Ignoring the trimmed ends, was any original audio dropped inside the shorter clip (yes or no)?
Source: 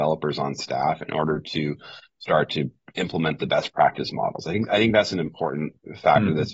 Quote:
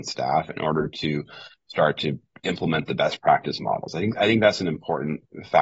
no